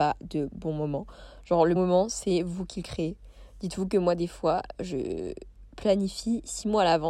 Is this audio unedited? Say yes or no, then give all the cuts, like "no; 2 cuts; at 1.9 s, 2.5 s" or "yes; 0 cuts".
no; 1 cut; at 1.8 s